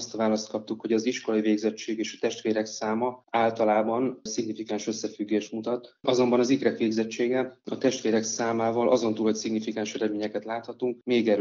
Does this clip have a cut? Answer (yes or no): no